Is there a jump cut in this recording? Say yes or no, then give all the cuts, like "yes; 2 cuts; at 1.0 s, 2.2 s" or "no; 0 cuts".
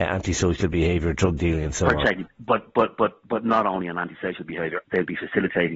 yes; 2 cuts; at 2.3 s, 4.8 s